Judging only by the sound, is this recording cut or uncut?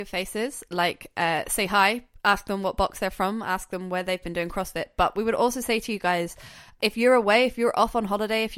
cut